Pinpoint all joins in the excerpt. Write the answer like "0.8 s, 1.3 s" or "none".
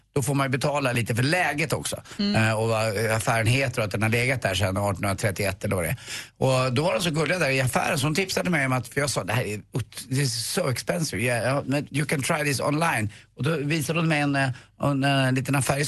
none